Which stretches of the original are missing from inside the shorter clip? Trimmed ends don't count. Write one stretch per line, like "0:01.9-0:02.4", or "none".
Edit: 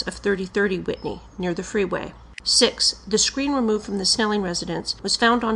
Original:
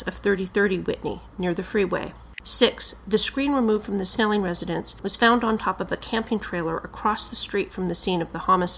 none

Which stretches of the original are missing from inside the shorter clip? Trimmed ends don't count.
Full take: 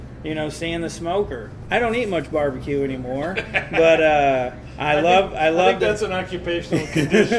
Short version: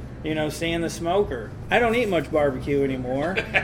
none

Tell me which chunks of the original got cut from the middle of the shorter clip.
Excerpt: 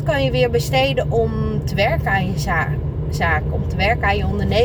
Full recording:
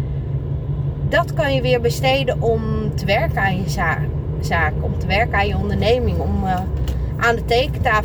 none

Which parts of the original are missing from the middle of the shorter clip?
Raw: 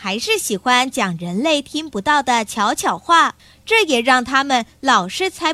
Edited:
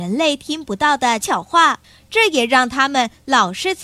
0:02.4-0:02.7

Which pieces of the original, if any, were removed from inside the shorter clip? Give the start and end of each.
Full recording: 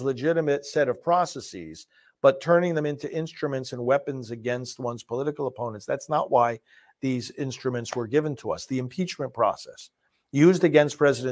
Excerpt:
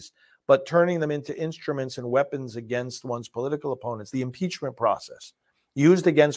0:05.9-0:08.7

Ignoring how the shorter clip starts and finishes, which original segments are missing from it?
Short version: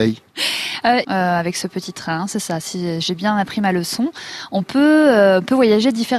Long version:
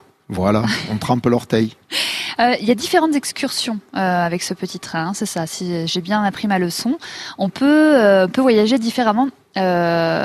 0:02.6-0:03.9

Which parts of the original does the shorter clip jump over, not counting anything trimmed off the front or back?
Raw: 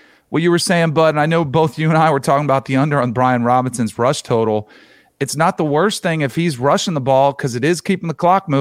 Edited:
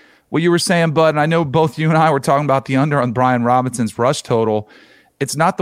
none

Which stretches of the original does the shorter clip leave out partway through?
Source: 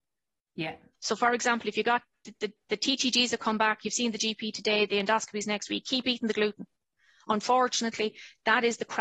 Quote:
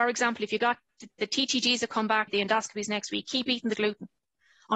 0:02.4-0:02.6
0:03.8-0:04.9

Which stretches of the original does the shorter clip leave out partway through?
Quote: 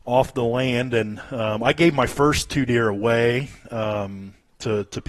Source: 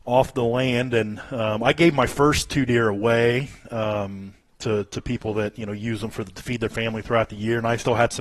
none

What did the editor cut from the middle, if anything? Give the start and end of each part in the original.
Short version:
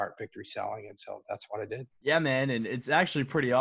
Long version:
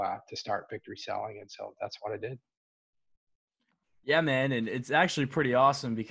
0:02.4-0:03.9

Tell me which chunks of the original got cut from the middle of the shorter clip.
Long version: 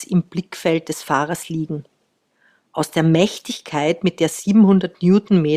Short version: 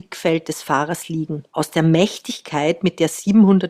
0:01.9-0:02.7

